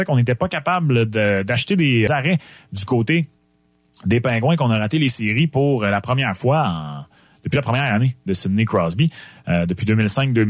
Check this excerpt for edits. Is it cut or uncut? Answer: cut